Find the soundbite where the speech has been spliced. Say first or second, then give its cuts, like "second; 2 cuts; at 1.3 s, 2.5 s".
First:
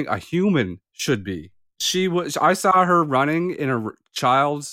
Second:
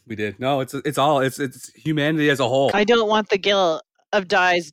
second; 1 cut; at 2.7 s